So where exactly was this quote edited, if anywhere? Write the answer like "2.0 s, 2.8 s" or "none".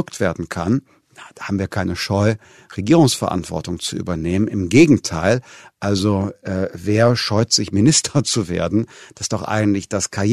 none